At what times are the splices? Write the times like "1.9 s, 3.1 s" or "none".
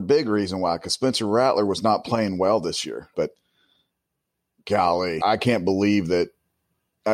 3.1 s, 5.2 s